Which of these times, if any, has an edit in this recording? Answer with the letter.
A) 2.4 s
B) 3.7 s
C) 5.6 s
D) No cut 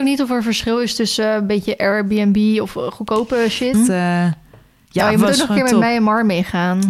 B